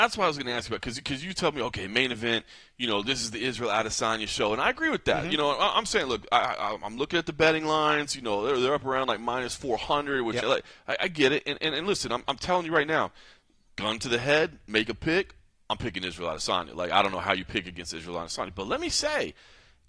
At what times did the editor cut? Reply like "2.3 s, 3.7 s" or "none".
10.4 s